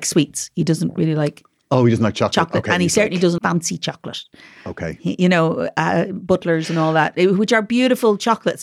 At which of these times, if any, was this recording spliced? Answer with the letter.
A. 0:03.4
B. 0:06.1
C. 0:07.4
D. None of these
A